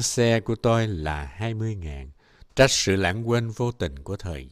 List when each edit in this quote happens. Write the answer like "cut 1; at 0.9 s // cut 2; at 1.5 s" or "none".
cut 1; at 2.5 s